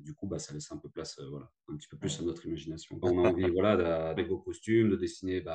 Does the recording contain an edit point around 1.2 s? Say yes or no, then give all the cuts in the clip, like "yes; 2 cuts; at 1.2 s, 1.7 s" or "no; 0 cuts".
no; 2 cuts; at 3.0 s, 4.2 s